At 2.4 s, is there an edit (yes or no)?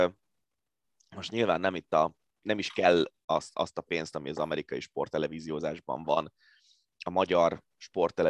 yes